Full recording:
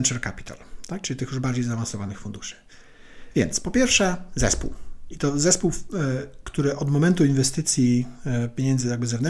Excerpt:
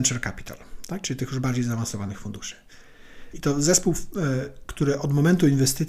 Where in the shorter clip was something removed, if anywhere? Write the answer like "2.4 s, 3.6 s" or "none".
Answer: 3.3 s